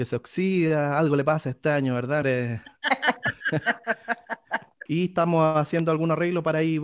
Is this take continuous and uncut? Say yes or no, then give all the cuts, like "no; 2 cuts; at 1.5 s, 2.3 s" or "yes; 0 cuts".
no; 2 cuts; at 2.2 s, 4.9 s